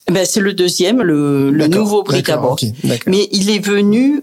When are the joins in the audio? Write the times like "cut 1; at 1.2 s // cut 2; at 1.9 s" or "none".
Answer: none